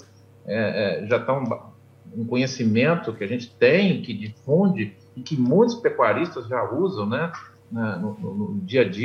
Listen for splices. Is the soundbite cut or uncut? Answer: uncut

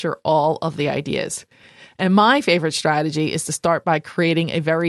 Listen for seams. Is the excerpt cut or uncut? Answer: uncut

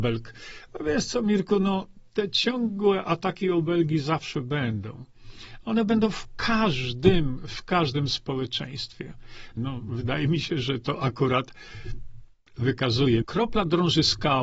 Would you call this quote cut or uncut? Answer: cut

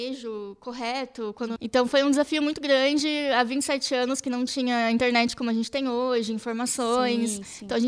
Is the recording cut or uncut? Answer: cut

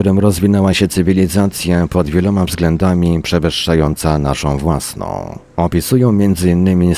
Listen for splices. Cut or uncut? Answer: uncut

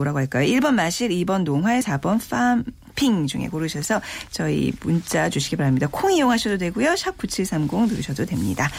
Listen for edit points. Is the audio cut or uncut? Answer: cut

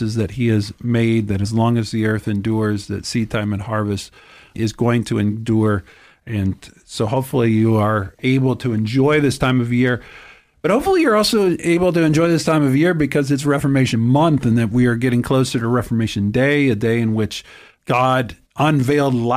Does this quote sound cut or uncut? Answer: uncut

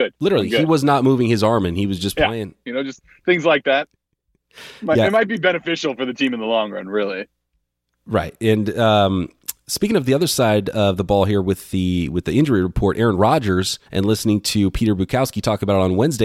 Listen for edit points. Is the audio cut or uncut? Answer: cut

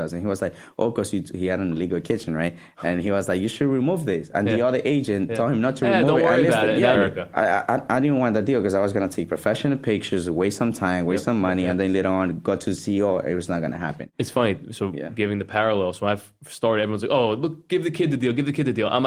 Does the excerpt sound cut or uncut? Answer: cut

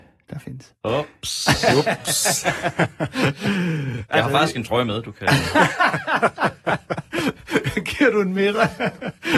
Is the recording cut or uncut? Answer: uncut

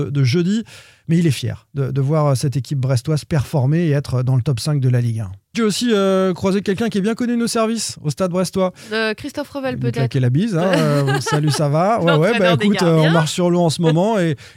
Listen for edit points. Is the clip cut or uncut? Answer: cut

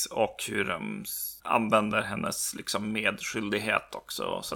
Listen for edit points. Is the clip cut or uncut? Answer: uncut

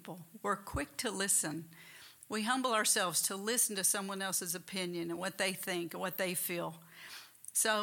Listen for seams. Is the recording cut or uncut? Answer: uncut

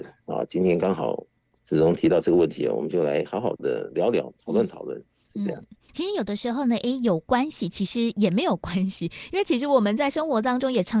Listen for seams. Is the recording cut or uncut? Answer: uncut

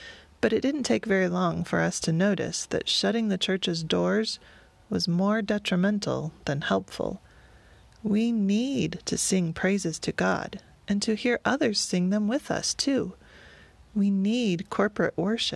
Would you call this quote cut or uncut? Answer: uncut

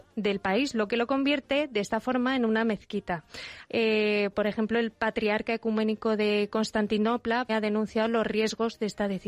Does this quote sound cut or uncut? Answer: cut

